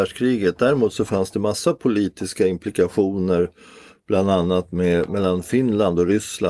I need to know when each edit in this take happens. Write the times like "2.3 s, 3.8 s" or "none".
5.1 s